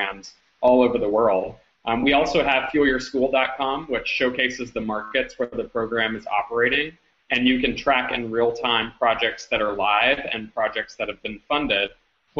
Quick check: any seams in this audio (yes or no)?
no